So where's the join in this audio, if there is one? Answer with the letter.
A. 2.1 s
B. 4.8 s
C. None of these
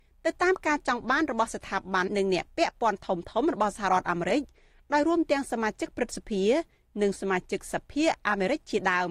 A